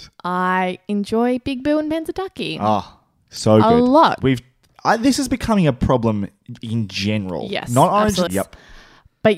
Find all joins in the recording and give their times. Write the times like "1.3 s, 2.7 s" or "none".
4.2 s, 8.3 s